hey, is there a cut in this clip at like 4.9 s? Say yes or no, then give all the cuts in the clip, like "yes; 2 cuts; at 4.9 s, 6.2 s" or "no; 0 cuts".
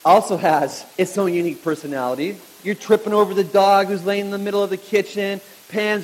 no; 2 cuts; at 0.9 s, 2.6 s